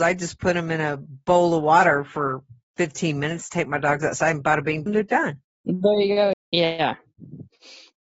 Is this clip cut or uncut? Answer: cut